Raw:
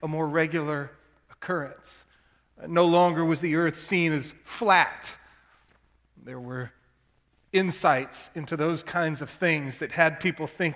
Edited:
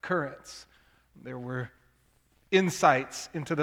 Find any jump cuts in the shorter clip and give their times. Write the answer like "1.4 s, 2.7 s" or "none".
1.1 s